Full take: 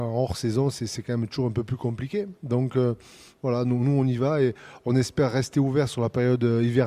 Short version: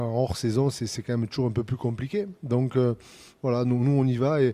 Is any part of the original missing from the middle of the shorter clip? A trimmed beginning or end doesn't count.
no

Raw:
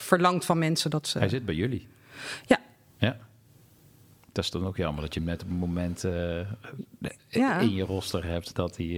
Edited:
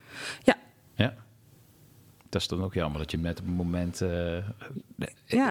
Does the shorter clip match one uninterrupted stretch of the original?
yes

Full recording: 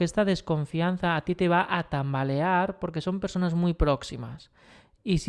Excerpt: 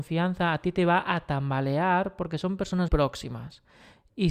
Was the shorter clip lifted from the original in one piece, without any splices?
no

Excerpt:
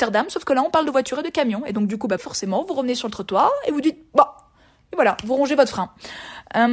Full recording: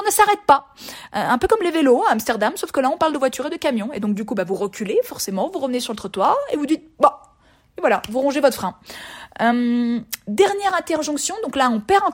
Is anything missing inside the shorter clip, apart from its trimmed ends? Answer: yes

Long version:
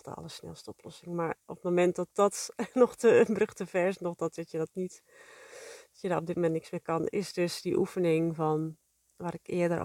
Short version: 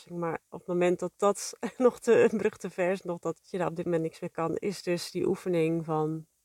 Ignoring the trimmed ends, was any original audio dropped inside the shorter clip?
yes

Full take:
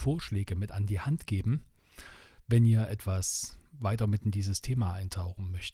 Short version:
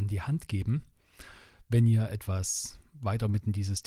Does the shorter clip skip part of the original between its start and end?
no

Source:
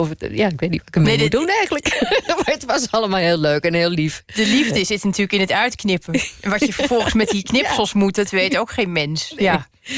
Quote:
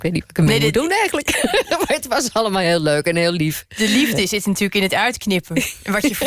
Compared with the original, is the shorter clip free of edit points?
yes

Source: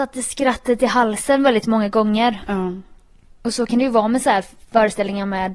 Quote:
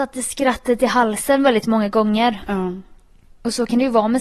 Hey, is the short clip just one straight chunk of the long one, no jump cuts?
yes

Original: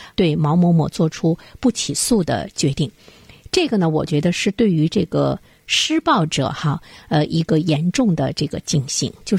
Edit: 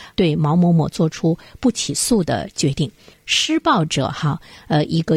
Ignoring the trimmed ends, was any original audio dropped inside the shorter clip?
yes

